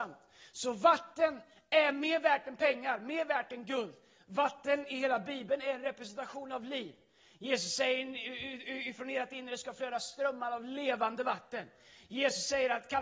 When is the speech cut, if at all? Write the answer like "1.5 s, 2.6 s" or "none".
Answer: none